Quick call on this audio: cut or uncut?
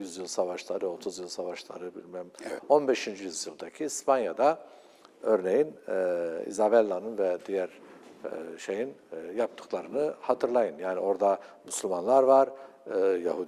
cut